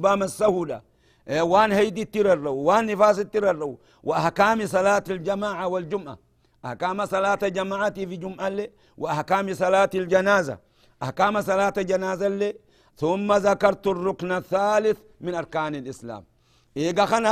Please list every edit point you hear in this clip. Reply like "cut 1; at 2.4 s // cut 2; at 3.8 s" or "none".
none